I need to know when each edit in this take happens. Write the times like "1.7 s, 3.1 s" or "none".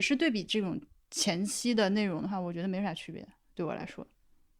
none